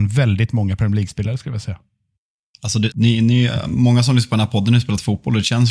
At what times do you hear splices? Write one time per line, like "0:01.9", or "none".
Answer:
0:02.9